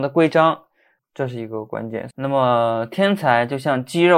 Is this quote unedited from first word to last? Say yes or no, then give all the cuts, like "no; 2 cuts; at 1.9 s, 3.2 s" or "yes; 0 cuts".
no; 2 cuts; at 1.0 s, 2.1 s